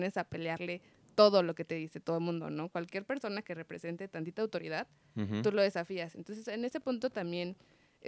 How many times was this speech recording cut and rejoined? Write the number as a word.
zero